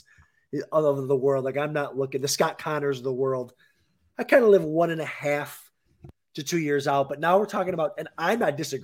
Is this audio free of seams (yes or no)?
yes